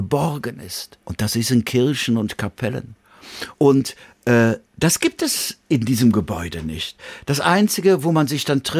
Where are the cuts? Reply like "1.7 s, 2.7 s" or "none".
1.0 s, 3.5 s